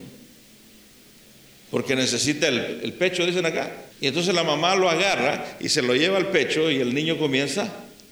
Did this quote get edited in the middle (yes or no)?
yes